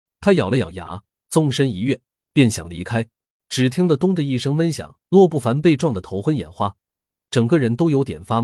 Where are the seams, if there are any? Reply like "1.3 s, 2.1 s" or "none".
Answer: 1.2 s, 3.4 s, 5.0 s